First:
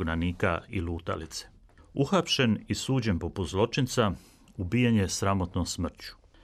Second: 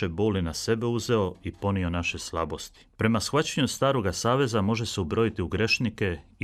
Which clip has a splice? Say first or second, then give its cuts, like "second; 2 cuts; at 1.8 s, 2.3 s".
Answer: second; 1 cut; at 2.9 s